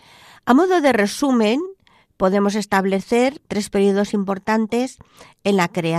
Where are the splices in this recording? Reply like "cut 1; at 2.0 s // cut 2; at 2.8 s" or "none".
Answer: cut 1; at 3.5 s